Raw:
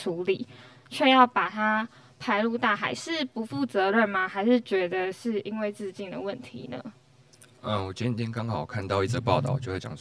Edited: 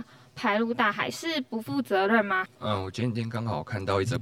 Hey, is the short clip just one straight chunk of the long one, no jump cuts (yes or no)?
no